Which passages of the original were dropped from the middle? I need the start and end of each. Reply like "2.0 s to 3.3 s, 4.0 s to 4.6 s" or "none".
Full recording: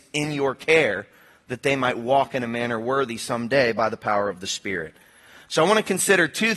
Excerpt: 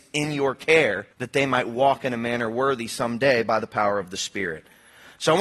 1.1 s to 1.4 s